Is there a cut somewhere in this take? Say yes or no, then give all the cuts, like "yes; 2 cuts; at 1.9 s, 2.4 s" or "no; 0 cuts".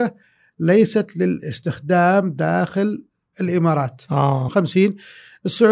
yes; 1 cut; at 4.5 s